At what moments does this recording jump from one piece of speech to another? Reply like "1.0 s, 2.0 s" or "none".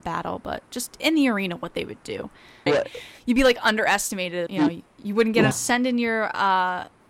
2.7 s, 4.5 s, 5.5 s